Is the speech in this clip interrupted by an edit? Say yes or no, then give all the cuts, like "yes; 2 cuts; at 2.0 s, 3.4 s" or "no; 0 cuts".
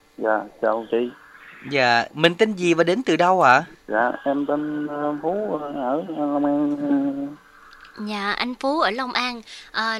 yes; 1 cut; at 2.1 s